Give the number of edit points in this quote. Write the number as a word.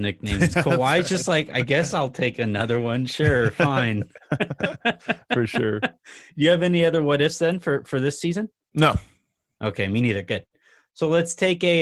zero